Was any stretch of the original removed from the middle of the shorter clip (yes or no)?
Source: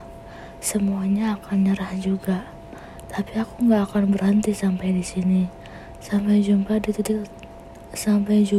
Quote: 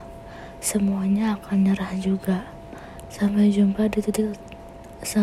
yes